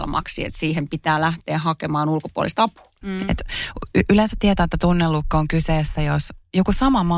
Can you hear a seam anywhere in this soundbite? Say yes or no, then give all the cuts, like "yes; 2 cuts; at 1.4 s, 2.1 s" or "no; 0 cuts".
yes; 1 cut; at 3.0 s